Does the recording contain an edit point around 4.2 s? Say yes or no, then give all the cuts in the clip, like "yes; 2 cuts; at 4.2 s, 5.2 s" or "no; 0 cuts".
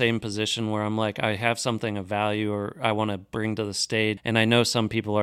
yes; 1 cut; at 4.2 s